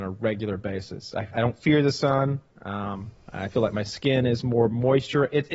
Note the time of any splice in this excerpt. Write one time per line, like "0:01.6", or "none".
0:01.3